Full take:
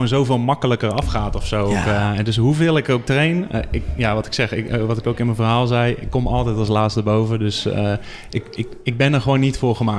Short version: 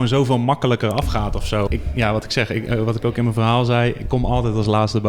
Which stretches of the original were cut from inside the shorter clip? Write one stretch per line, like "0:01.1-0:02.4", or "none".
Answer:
0:01.7-0:03.7

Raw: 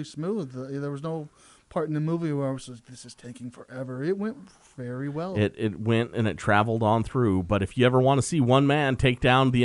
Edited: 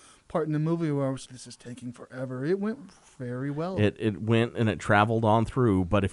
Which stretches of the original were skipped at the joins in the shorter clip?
0:02.7-0:02.8

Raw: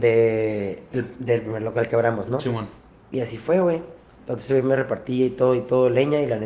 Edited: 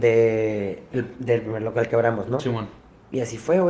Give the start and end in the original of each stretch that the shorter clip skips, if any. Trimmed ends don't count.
none

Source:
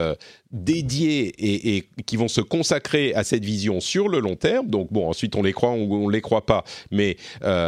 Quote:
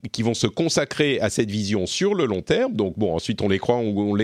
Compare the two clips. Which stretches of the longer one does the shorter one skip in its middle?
none

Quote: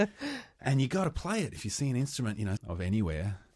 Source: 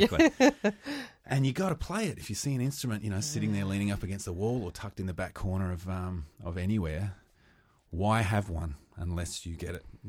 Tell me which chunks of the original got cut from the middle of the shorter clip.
0:03.2-0:06.3

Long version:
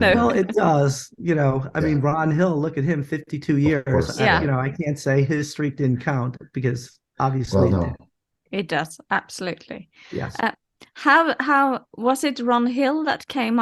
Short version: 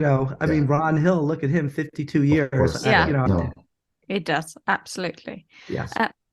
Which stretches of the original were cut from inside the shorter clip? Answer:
0:04.6-0:07.7

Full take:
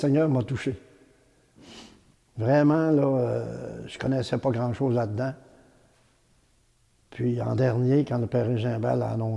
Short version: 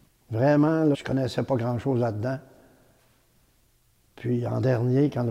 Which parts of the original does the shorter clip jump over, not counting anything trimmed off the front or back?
0:03.0-0:03.9

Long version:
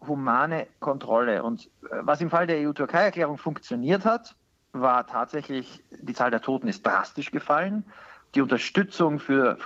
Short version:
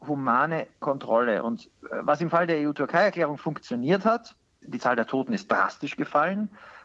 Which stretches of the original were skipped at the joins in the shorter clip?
0:04.6-0:06.0

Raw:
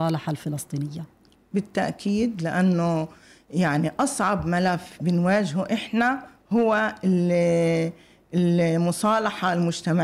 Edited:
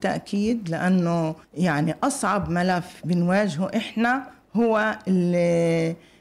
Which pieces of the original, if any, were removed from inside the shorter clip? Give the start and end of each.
0:03.2-0:03.4

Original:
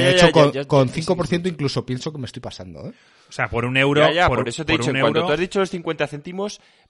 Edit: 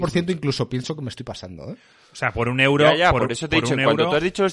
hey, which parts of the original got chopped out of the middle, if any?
none

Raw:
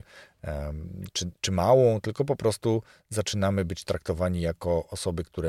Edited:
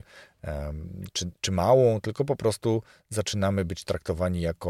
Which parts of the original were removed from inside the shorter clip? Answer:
none

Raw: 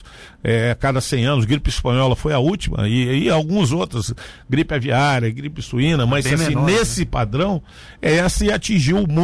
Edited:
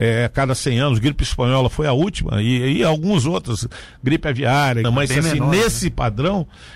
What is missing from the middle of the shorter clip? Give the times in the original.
0:05.3-0:06.0

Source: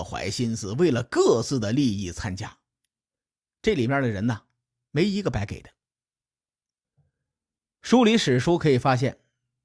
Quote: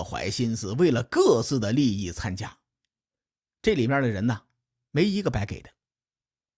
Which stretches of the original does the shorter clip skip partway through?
none

